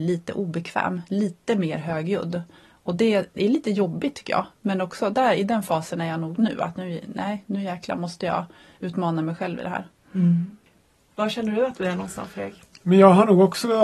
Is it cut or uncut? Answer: uncut